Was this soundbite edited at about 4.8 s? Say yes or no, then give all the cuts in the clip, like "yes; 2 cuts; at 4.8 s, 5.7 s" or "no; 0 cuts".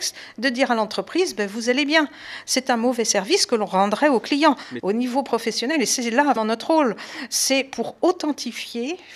yes; 2 cuts; at 4.8 s, 6.4 s